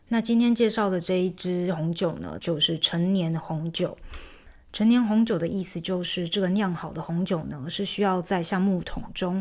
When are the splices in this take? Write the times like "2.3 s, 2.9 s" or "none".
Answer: 2.4 s